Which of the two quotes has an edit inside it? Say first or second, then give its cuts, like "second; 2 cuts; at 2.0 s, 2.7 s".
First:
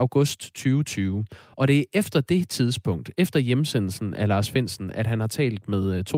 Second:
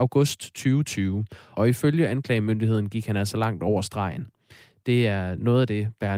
second; 1 cut; at 1.5 s